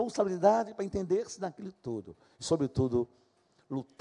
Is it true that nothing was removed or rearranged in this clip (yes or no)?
yes